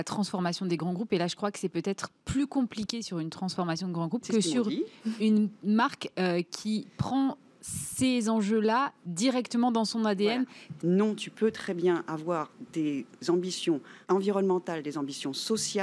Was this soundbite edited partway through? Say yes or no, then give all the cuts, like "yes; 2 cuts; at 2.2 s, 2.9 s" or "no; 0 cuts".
yes; 2 cuts; at 10.8 s, 14.0 s